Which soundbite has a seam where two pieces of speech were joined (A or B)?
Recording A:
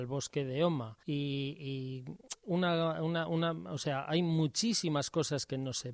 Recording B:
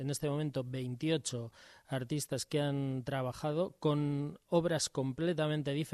A